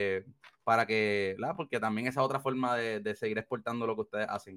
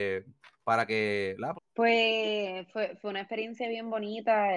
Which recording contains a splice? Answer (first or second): second